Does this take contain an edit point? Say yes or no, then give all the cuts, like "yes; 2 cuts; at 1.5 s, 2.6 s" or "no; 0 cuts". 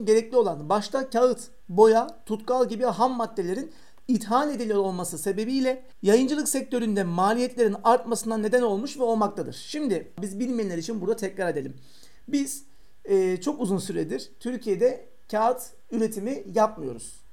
no; 0 cuts